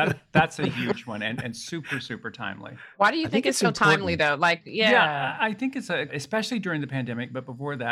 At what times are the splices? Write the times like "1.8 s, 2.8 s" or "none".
6.1 s